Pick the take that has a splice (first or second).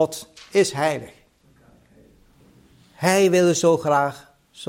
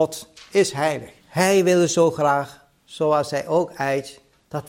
second